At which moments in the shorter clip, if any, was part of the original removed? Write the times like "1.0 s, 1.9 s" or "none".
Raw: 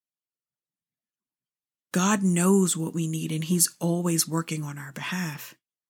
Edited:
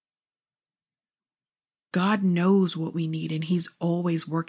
none